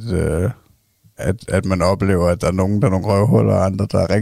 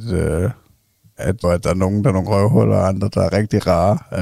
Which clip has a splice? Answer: second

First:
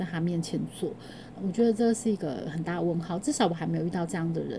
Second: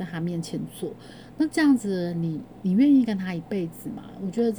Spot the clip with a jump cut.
first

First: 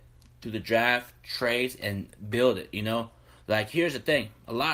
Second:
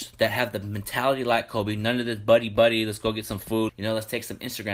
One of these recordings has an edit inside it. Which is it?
second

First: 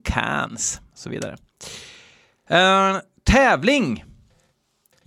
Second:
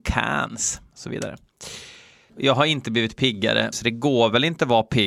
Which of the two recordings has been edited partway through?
second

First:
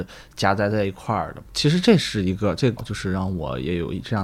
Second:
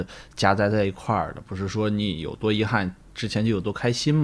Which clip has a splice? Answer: first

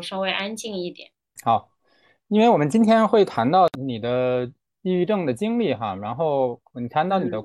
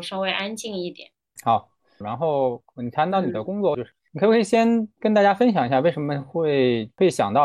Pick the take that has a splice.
second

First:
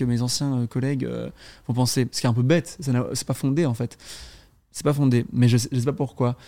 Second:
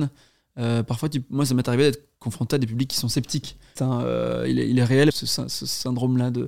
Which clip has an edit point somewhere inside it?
second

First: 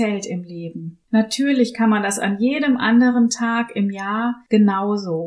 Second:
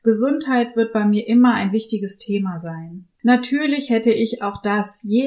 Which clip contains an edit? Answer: second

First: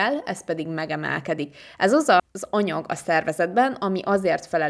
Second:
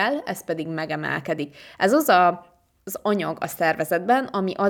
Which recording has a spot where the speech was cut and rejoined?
first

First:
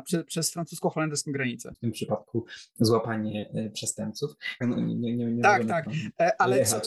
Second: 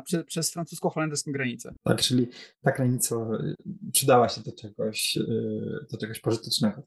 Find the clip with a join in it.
first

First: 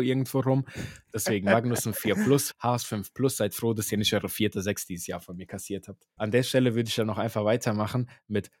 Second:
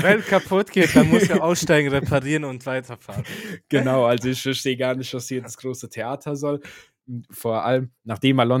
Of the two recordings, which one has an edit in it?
first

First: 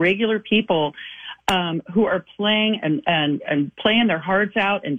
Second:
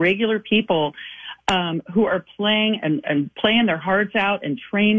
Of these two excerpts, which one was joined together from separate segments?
second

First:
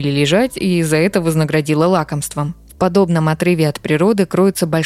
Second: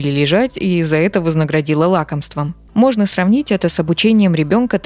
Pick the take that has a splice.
second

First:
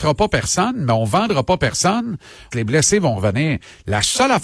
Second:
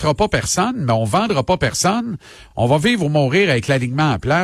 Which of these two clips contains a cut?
first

